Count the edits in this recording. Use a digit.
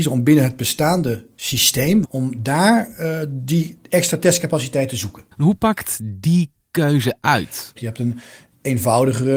3